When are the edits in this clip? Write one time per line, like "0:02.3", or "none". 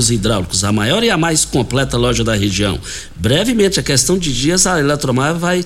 none